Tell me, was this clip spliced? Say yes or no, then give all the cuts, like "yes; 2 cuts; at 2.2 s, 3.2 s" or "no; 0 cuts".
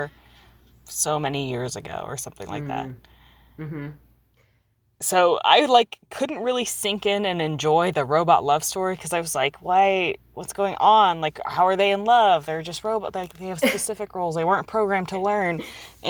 no; 0 cuts